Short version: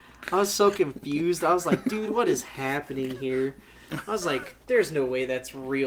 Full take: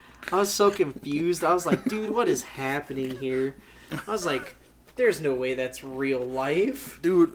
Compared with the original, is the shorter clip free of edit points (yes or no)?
no